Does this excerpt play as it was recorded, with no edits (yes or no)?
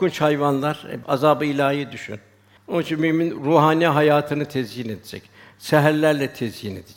no